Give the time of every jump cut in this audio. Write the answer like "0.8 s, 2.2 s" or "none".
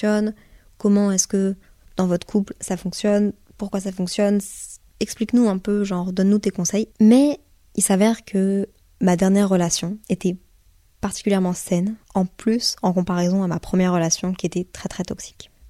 6.9 s, 10.0 s, 12.0 s